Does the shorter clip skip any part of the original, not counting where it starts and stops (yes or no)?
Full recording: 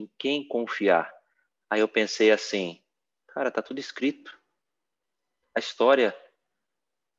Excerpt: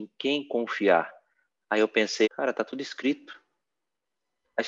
yes